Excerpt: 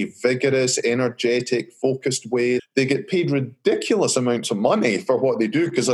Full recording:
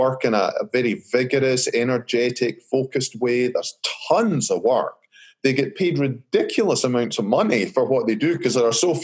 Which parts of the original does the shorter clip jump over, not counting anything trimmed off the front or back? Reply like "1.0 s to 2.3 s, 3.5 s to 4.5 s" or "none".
3.5 s to 5.3 s